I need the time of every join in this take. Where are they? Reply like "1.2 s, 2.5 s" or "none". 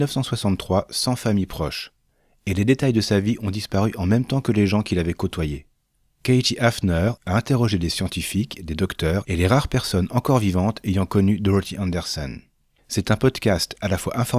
7.2 s, 12.8 s